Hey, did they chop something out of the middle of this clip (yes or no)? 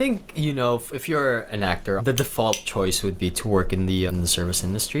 yes